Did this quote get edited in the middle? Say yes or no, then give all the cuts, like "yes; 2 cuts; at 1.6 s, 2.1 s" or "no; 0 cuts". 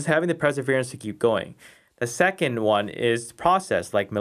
no; 0 cuts